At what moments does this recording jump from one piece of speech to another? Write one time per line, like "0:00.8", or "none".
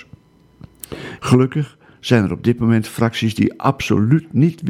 0:01.2